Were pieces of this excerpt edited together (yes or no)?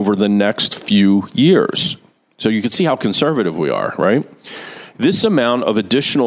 no